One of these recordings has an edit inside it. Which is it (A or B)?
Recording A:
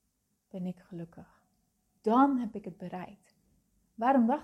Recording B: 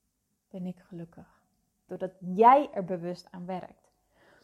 B